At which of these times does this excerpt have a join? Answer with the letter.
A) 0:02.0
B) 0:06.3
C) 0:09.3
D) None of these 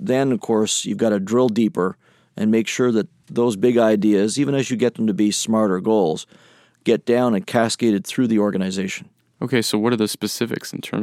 D